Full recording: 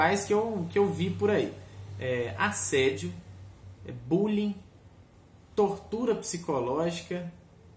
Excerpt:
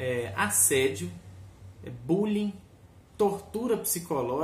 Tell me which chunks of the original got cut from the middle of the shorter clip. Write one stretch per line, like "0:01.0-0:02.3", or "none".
0:05.1-0:05.4